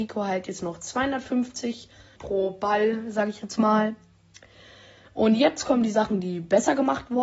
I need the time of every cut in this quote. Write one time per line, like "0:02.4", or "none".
0:02.2